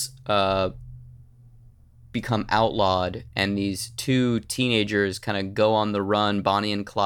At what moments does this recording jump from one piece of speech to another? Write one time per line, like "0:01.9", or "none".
none